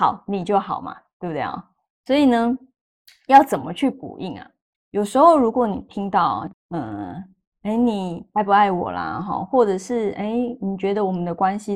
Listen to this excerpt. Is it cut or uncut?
cut